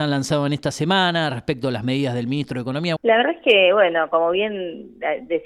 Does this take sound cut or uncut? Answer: cut